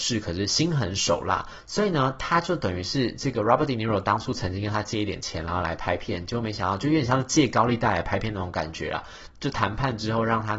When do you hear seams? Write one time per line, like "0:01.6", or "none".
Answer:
0:09.3